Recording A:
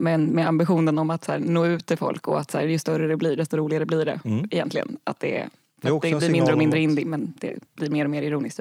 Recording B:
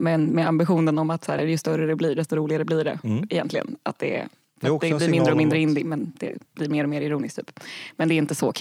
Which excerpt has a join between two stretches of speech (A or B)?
B